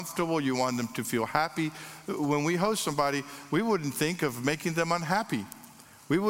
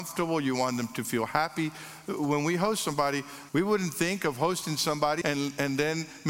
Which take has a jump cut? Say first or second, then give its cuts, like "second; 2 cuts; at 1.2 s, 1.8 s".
second; 2 cuts; at 3.5 s, 5.2 s